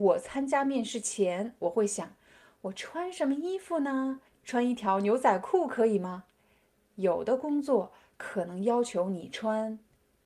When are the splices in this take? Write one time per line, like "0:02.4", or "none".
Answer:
0:04.3

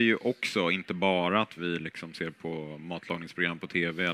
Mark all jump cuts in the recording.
0:01.6

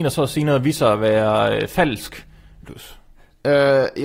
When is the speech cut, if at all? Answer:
0:02.6

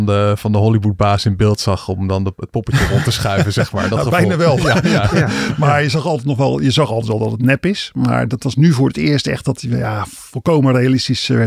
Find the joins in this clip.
none

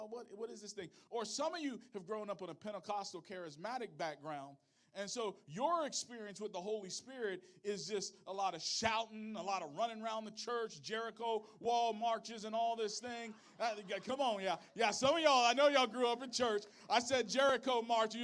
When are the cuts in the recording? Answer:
none

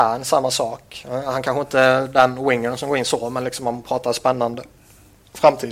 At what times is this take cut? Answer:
none

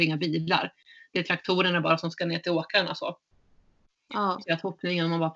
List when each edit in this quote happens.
0:04.4

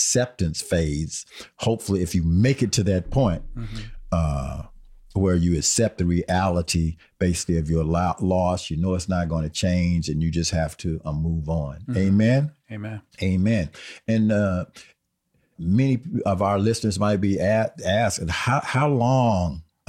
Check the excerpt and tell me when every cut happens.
0:13.1
0:15.5

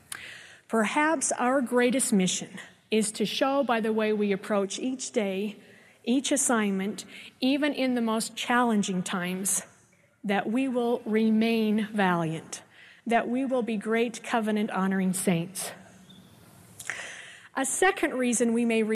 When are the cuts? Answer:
none

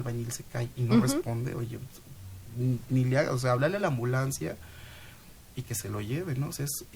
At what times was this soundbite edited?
none

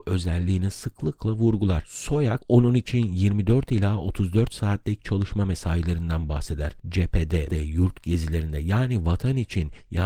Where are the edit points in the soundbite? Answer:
0:07.5

